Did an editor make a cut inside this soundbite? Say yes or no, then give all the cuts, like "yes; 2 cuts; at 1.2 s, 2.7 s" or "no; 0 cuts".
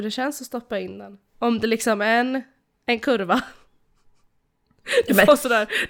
no; 0 cuts